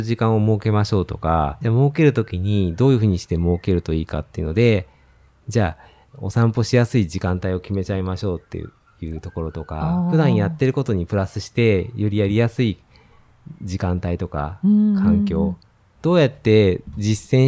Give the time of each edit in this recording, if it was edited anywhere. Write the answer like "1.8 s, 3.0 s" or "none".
1.6 s, 6.1 s, 16.0 s